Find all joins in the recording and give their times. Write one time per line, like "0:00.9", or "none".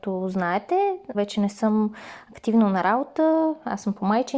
0:01.1